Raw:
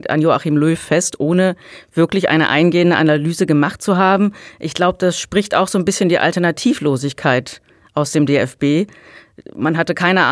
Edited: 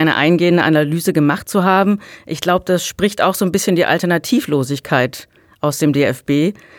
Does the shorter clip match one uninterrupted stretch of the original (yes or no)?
yes